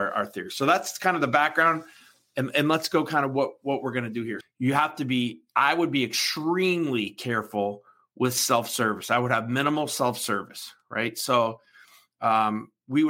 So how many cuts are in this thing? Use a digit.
1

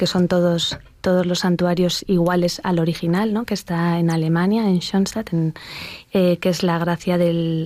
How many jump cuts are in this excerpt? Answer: 1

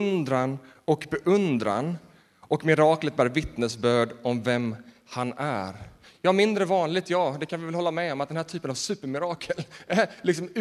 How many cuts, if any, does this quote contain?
0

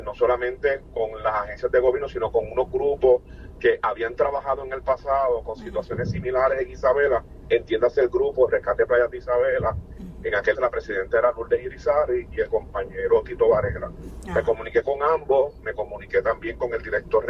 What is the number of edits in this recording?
1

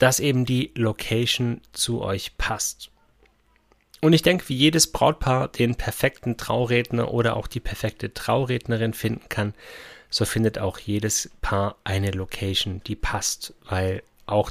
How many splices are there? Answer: 0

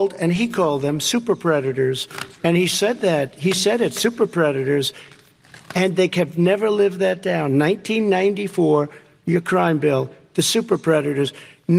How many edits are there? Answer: 0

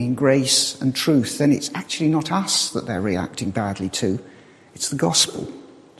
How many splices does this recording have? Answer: 0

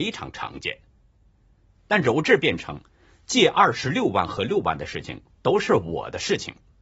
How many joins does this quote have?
1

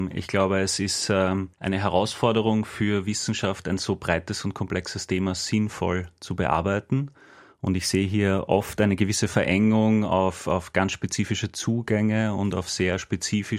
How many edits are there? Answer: 1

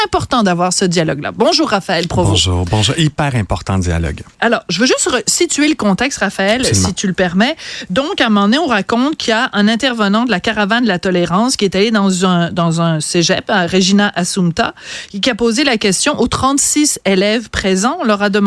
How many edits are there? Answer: 1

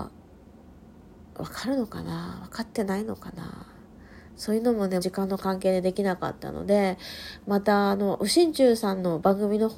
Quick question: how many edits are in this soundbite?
1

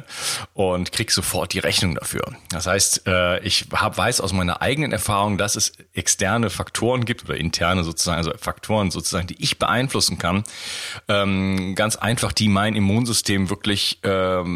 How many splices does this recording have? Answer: 0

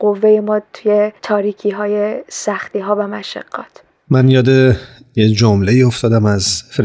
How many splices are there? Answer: 1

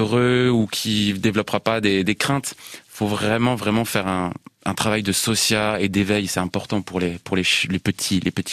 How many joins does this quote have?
0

